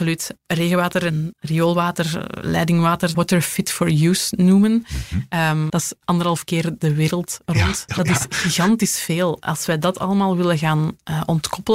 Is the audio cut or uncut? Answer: cut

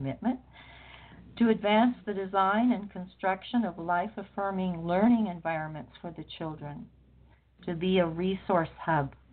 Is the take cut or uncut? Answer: uncut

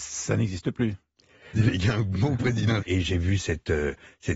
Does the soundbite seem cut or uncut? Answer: cut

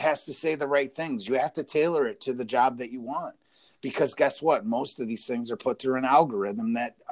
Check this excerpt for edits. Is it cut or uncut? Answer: uncut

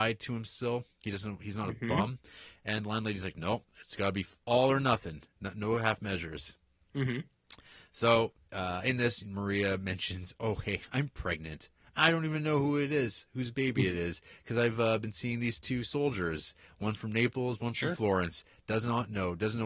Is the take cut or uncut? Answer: uncut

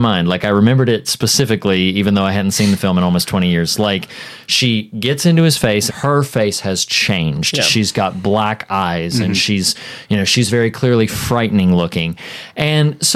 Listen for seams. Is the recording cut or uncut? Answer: cut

